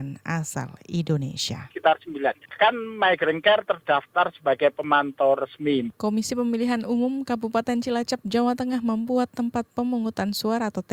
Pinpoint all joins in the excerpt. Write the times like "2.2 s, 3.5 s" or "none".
1.7 s, 5.9 s